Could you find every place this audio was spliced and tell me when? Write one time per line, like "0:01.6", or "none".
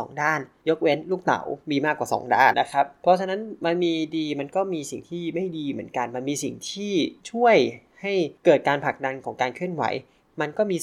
0:02.5